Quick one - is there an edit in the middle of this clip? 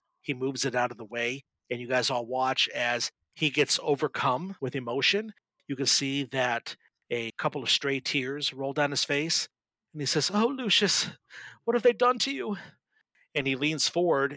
no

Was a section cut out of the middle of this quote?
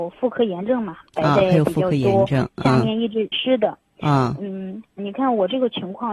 yes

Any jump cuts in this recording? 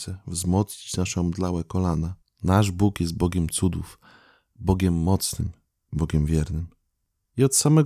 yes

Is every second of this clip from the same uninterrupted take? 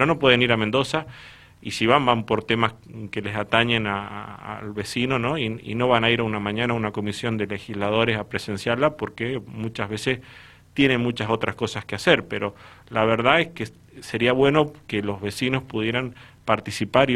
yes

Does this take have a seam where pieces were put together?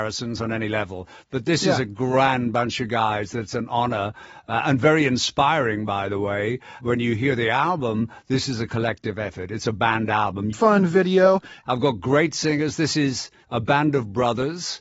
yes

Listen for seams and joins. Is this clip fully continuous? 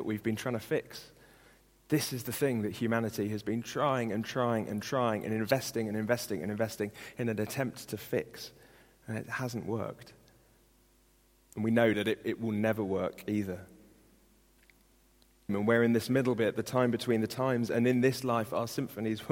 no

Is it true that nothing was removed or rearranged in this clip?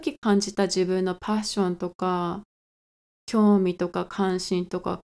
yes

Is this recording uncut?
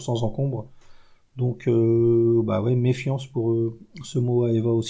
yes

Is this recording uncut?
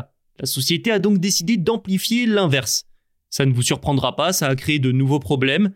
yes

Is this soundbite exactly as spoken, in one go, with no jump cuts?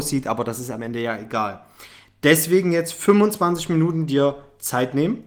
yes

